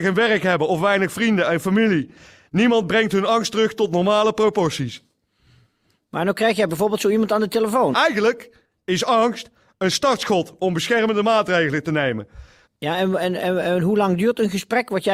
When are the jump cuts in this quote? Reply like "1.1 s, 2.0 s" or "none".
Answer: 7.9 s, 12.6 s

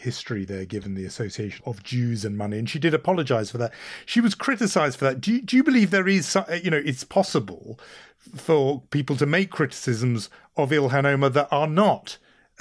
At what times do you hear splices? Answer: 1.6 s

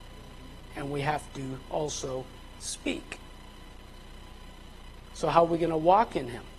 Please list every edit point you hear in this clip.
none

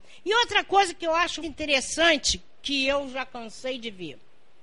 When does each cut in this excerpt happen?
1.4 s

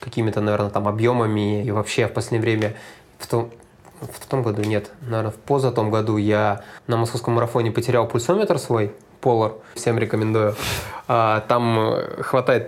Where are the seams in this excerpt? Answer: 9.8 s

